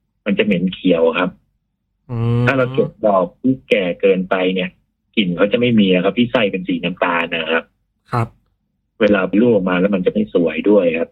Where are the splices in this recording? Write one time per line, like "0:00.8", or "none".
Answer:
0:09.3

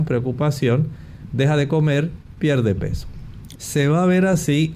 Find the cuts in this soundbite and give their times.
0:03.5

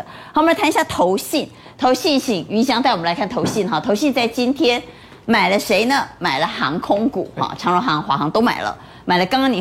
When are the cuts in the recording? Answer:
none

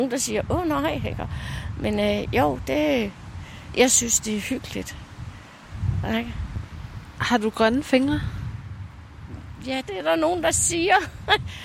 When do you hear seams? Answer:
0:03.7
0:09.8

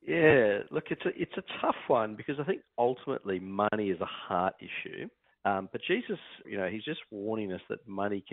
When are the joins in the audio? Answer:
0:05.3
0:06.4

